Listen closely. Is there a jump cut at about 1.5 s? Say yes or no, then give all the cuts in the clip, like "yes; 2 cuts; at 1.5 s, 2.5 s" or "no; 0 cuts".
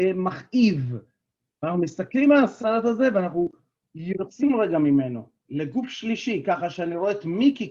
no; 0 cuts